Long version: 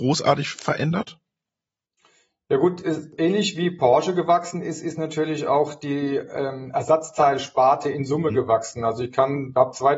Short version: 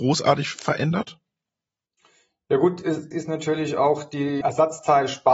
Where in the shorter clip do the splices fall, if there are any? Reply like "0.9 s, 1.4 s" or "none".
3.1 s, 4.4 s

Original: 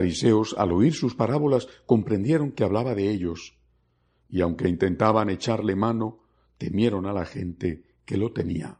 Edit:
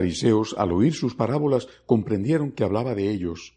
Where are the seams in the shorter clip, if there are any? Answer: none

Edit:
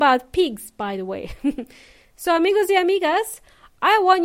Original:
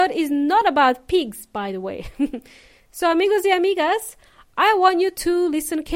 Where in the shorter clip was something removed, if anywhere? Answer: none

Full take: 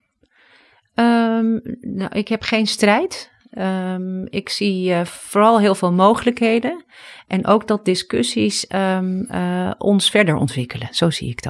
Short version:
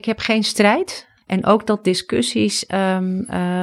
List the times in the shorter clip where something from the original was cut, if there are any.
1.2 s

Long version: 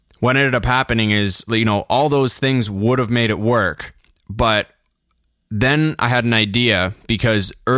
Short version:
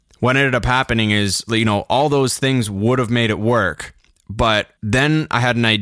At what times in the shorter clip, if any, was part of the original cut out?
4.8 s

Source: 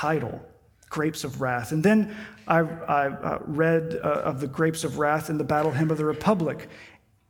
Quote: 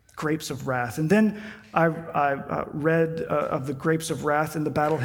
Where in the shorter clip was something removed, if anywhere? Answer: none

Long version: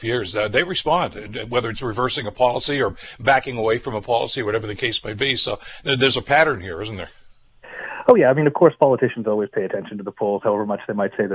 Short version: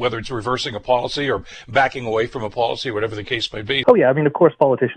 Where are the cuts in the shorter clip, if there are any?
3.8 s

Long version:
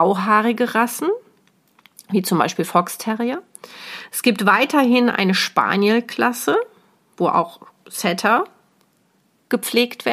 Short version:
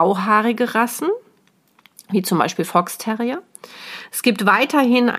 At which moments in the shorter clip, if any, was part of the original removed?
none

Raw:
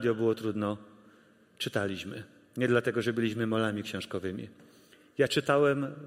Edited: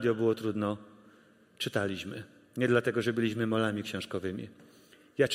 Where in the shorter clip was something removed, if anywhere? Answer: none

